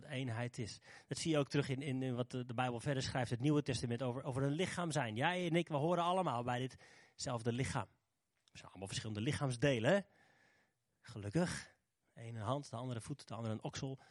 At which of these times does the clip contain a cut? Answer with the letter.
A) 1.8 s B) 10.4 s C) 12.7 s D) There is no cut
D